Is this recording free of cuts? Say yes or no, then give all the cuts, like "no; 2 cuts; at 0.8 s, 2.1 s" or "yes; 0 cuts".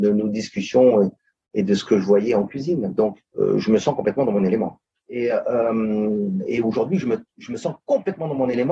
no; 2 cuts; at 3.2 s, 5.0 s